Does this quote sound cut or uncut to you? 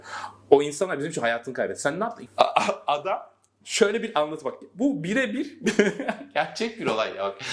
cut